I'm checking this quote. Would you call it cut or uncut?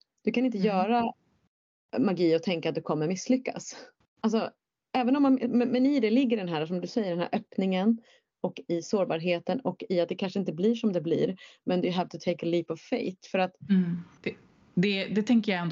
cut